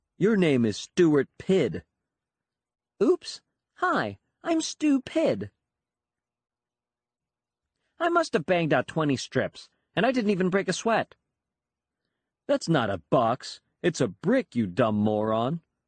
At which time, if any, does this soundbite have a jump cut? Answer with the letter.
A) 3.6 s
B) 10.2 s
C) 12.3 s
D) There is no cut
C